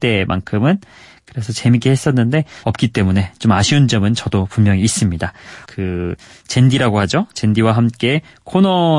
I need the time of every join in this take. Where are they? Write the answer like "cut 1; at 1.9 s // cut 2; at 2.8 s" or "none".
cut 1; at 2.6 s // cut 2; at 5.6 s

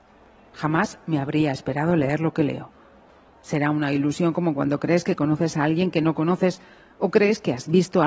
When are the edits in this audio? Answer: none

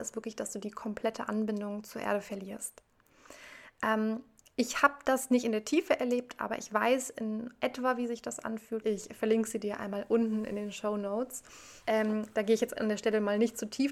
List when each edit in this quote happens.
cut 1; at 8.8 s // cut 2; at 11.8 s

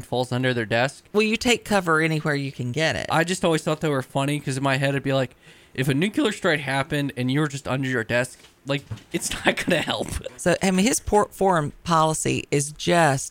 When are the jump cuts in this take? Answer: cut 1; at 10.3 s

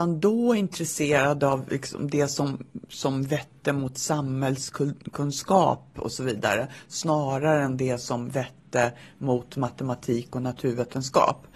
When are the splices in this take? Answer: none

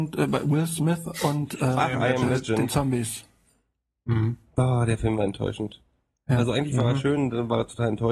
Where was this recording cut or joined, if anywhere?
none

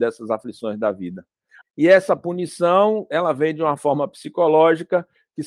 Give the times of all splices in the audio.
cut 1; at 1.6 s

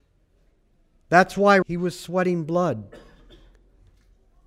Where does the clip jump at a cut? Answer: cut 1; at 1.6 s

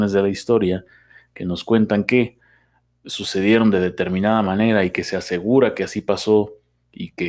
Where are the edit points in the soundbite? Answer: none

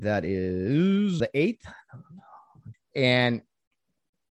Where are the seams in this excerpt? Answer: cut 1; at 1.2 s // cut 2; at 2.7 s

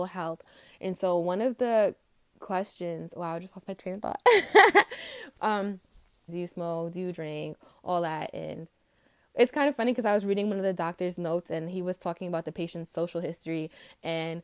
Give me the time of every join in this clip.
cut 1; at 6.3 s

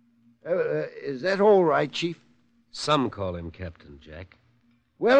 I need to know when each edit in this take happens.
none

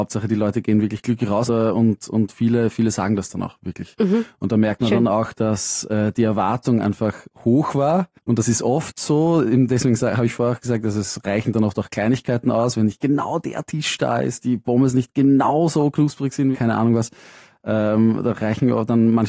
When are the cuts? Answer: cut 1; at 1.5 s // cut 2; at 14.4 s // cut 3; at 16.5 s

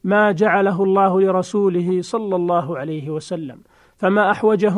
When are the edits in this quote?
none

